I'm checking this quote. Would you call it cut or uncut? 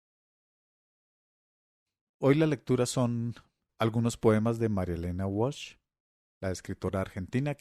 uncut